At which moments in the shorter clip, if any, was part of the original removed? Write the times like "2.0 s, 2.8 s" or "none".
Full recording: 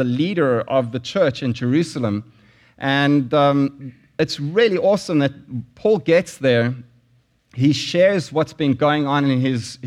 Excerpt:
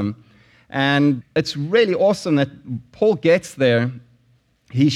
1.2 s